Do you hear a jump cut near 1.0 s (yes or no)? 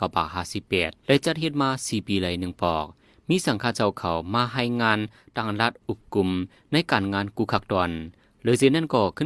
yes